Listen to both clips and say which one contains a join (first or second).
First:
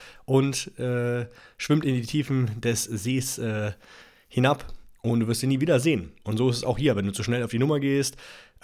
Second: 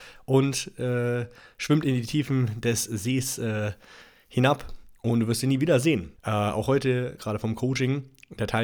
second